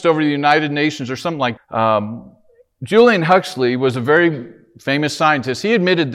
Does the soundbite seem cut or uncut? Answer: cut